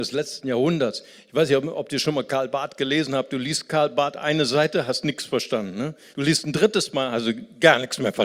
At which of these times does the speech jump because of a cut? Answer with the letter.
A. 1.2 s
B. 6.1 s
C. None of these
B